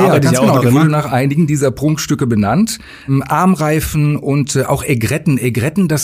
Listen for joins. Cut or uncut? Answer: uncut